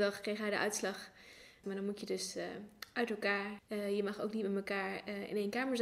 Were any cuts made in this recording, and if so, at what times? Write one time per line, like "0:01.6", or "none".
0:01.6
0:03.6